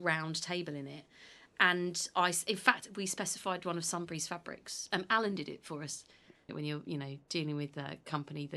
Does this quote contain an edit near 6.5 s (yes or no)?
yes